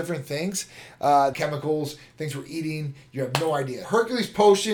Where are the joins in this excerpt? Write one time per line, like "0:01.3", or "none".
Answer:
0:01.3
0:03.8

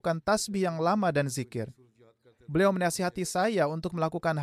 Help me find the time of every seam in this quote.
none

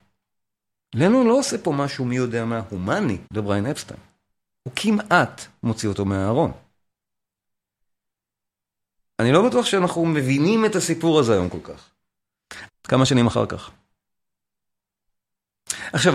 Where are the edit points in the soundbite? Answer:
0:03.3
0:12.7

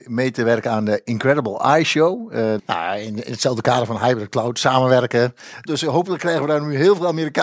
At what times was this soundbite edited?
0:02.6
0:05.7

